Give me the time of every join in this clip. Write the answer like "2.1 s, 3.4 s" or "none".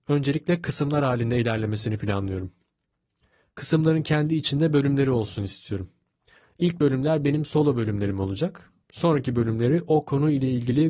3.4 s, 8.8 s

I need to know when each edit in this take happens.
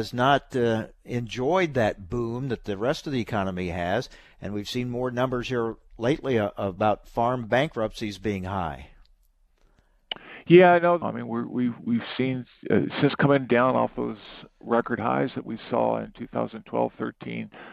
11.0 s

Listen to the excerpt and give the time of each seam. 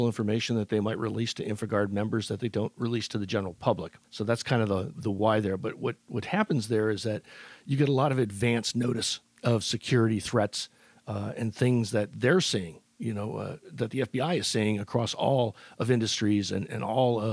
4.0 s

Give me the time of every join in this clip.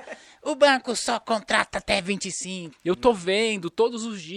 2.7 s

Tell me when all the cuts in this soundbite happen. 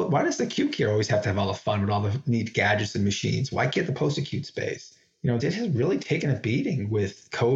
5.4 s

